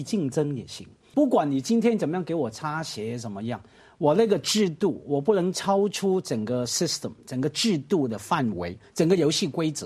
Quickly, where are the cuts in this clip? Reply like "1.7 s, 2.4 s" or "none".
1.1 s